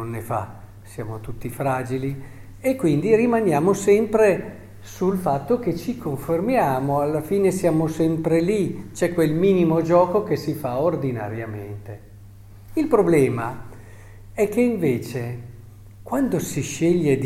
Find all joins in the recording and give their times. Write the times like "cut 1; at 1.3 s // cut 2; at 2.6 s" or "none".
none